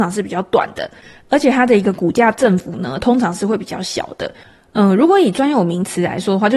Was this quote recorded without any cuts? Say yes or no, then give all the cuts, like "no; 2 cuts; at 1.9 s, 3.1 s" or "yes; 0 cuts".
yes; 0 cuts